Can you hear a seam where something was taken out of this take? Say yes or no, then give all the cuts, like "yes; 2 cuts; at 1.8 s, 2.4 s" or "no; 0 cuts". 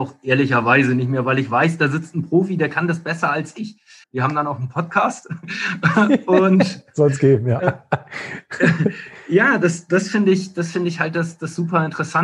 yes; 1 cut; at 4.0 s